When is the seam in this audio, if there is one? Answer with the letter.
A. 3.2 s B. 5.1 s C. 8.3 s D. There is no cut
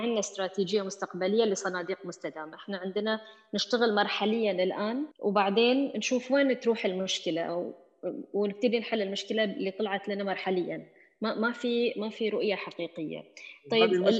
B